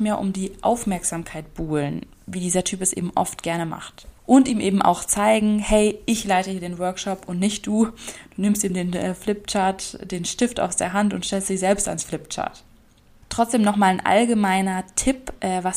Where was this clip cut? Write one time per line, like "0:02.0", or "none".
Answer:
0:04.2